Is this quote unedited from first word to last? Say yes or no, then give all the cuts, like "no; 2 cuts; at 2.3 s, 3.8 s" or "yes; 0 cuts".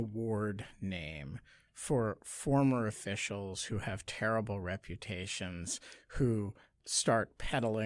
yes; 0 cuts